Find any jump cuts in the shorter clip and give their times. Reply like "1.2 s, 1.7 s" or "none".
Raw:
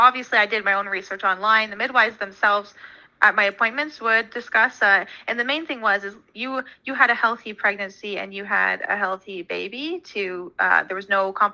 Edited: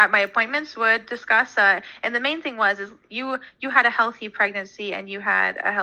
none